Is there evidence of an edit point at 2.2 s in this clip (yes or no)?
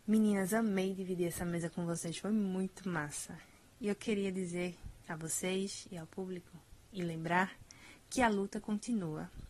no